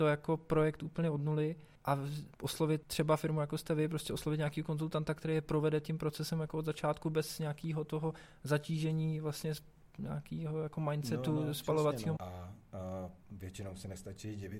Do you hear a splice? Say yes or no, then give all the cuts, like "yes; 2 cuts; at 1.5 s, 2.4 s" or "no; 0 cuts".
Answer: yes; 1 cut; at 12.2 s